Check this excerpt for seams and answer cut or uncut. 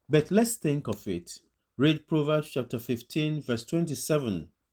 cut